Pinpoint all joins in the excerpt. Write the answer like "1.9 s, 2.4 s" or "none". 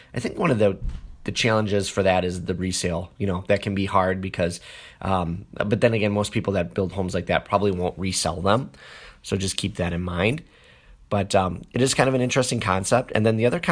none